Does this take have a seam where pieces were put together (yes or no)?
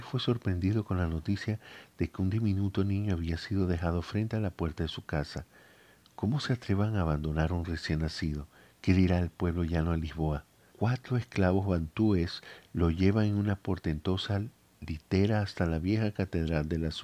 yes